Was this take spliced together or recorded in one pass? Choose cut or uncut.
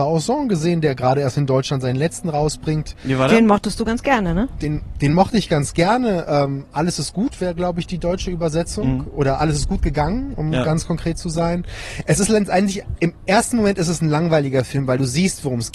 uncut